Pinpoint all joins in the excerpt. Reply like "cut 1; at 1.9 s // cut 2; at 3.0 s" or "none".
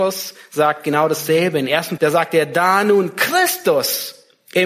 cut 1; at 2.0 s